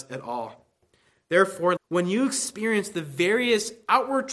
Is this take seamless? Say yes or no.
no